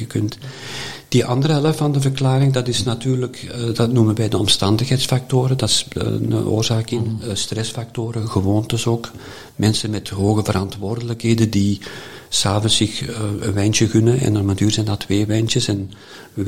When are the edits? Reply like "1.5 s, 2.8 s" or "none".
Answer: 6.0 s